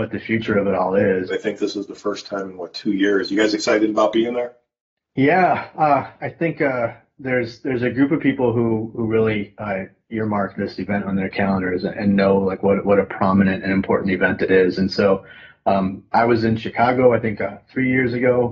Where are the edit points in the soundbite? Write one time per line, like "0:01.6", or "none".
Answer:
0:01.3